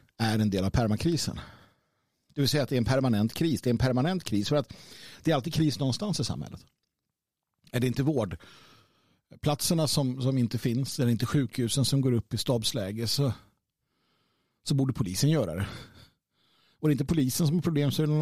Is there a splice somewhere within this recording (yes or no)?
no